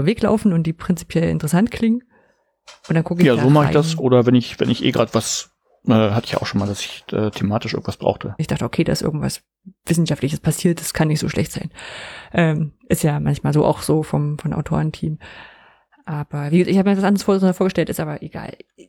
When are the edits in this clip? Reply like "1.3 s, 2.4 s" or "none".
8.4 s